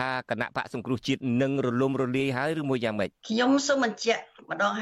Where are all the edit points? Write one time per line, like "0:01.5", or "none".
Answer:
0:03.2